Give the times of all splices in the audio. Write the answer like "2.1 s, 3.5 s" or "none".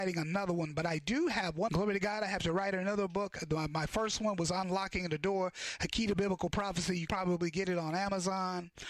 1.7 s, 7.1 s